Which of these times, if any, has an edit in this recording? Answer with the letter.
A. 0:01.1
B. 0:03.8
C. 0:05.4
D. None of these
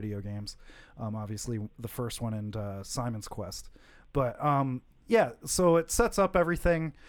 D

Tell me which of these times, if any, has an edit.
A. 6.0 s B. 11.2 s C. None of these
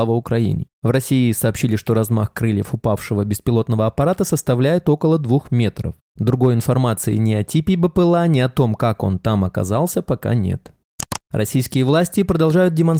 B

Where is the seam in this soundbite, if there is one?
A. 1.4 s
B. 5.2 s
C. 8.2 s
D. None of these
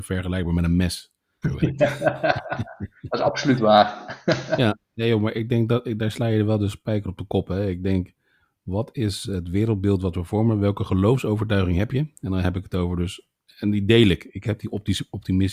A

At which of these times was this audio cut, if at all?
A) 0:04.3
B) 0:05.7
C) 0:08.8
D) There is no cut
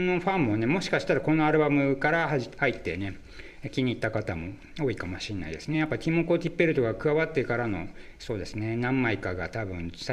D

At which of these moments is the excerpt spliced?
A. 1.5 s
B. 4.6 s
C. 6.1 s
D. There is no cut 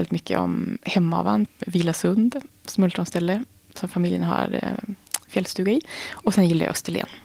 A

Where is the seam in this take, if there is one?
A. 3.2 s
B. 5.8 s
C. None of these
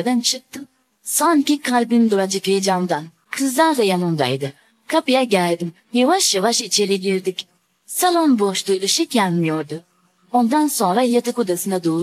B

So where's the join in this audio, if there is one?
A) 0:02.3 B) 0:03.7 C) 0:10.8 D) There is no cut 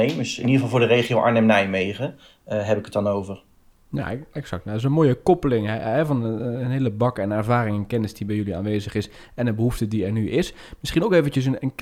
B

